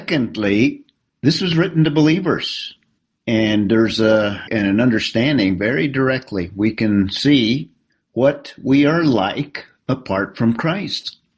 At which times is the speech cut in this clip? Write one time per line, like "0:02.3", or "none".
0:04.5